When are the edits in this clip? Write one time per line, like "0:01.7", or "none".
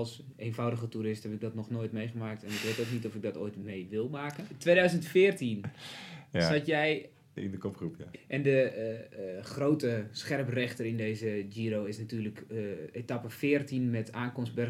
0:08.1